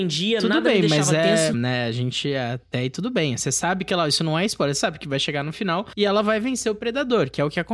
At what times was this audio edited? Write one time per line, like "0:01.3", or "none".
0:01.5